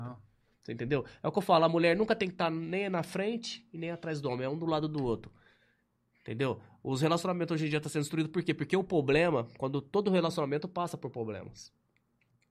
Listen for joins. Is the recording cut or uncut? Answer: uncut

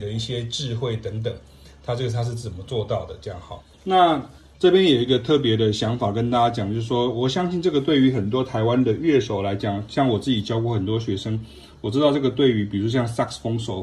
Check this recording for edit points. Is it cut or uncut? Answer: cut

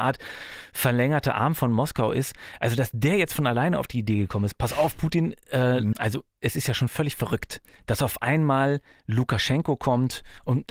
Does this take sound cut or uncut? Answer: cut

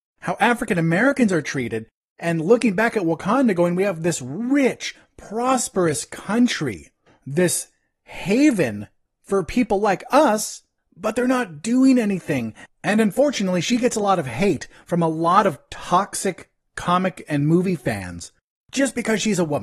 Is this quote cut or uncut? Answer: cut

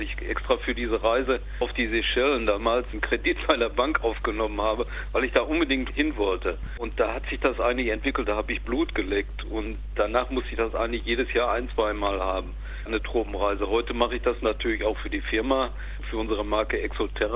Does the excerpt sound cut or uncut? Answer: uncut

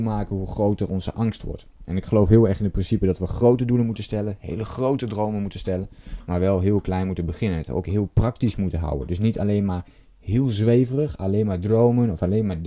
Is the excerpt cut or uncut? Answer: uncut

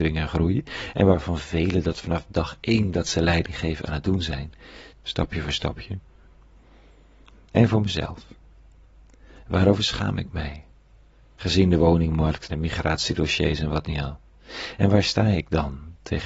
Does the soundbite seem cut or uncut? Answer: cut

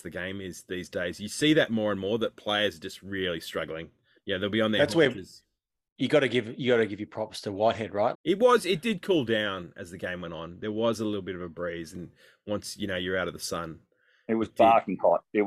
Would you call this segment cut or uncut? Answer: cut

